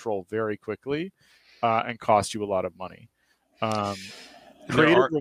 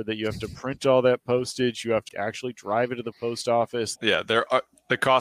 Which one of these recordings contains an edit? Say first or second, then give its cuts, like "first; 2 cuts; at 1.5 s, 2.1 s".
second; 2 cuts; at 2.1 s, 4.0 s